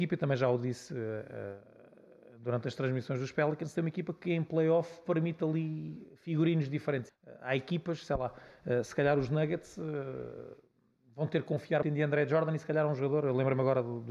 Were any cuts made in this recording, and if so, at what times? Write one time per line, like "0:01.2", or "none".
0:07.1
0:11.8